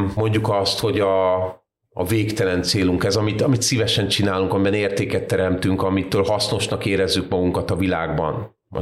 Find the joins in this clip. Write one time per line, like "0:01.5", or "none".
none